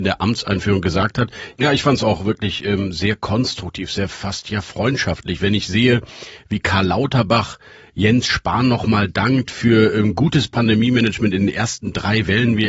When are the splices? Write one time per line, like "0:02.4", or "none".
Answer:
0:01.5